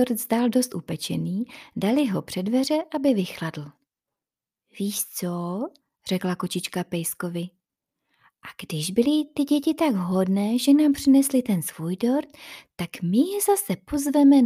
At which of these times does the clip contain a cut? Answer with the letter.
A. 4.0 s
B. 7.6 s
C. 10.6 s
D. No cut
D